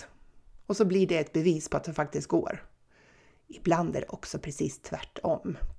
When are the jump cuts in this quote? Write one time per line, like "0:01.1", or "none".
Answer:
none

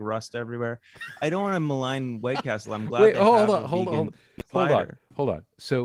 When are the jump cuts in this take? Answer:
none

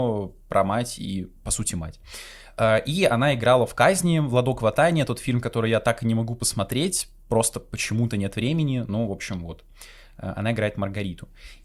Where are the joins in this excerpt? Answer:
0:01.4

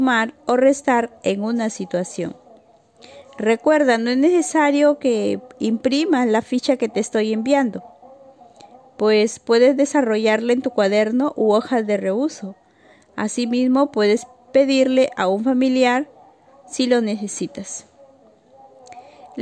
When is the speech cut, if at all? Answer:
none

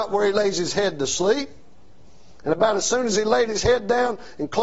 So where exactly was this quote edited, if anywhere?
0:02.4

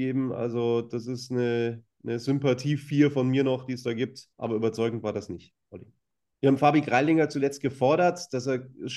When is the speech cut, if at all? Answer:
0:04.3
0:06.4

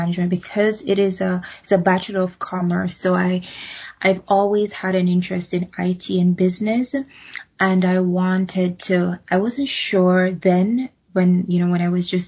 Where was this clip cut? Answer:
none

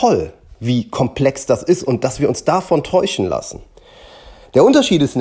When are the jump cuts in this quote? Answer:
none

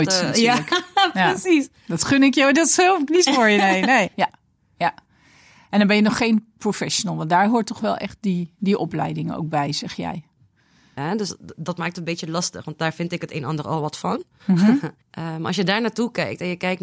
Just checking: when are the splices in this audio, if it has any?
0:04.1
0:11.0
0:15.0

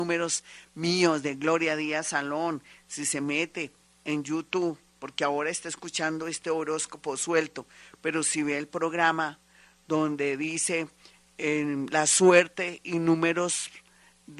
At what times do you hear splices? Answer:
0:11.2

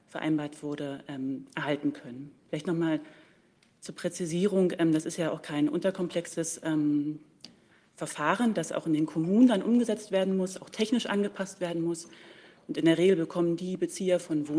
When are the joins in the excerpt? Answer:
none

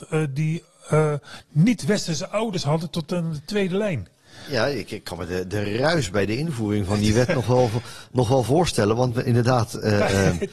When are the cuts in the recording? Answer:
none

